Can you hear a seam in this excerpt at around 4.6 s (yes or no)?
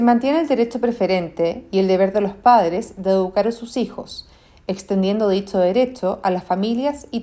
no